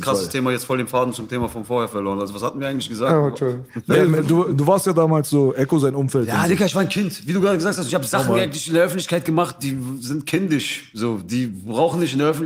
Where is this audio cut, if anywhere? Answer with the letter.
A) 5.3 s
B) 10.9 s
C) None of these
C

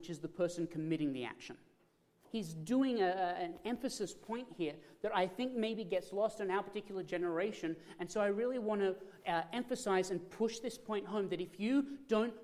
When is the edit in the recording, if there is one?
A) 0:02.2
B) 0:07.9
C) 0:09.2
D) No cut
A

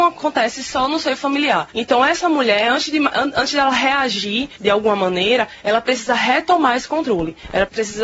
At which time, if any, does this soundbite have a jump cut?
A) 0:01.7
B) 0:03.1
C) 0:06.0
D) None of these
A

